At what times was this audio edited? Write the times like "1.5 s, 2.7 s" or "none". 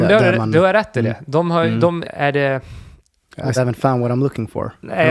2.0 s, 3.6 s